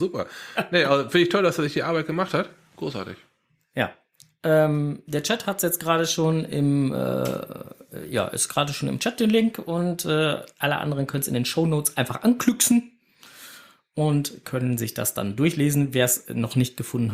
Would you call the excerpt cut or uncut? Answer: uncut